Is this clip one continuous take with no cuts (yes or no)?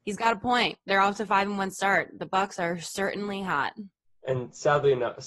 yes